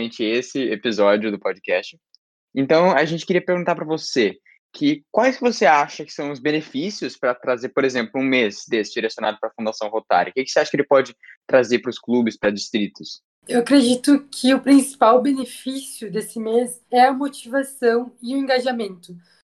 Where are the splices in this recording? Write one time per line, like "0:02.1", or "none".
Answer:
0:16.9